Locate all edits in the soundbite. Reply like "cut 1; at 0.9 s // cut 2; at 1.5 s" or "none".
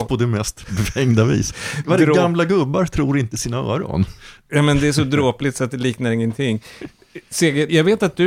none